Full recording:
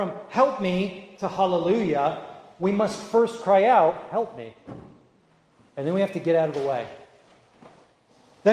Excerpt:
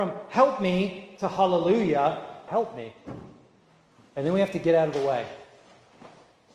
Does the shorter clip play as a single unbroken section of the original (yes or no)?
no